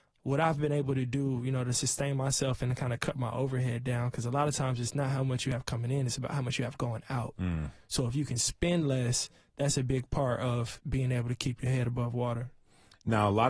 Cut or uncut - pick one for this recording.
uncut